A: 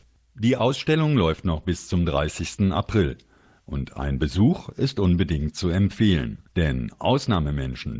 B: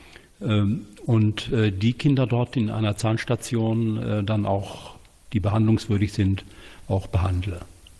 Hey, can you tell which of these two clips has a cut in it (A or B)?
A